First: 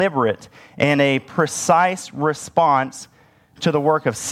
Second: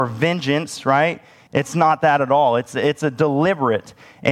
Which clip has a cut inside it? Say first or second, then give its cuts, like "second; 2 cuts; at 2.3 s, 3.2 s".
second; 1 cut; at 1.5 s